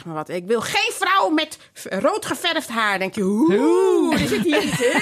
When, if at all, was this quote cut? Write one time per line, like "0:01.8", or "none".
none